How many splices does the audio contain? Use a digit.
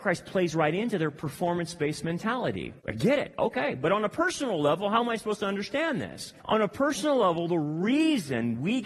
2